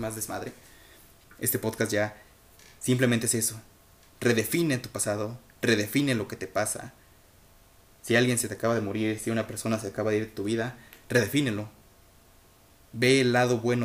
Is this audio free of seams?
yes; 0 cuts

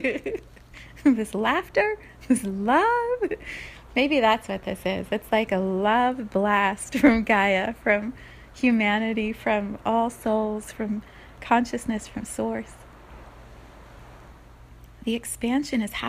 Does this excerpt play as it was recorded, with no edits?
yes; 0 cuts

